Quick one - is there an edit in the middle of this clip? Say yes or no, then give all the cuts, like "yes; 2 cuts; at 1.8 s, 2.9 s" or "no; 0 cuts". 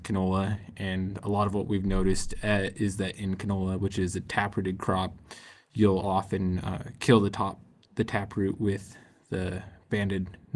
no; 0 cuts